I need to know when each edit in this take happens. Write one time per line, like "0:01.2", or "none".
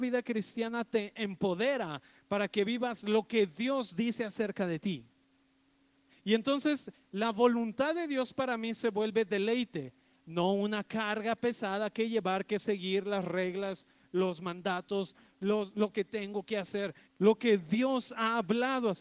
0:06.1
0:17.0